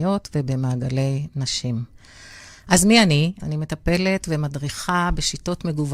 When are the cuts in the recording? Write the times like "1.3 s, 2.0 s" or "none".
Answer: 3.4 s